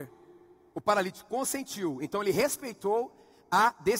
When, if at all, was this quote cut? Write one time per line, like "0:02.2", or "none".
none